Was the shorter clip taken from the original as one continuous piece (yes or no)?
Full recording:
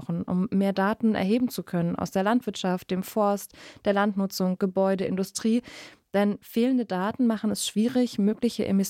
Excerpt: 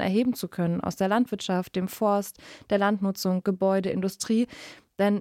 yes